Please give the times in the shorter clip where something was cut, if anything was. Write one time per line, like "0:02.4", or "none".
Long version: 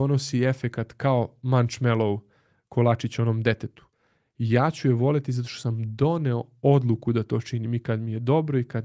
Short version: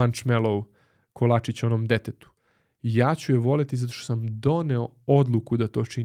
none